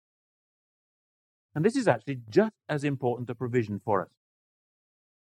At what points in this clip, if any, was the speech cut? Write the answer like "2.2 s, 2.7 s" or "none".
none